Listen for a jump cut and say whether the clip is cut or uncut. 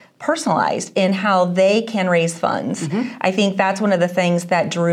uncut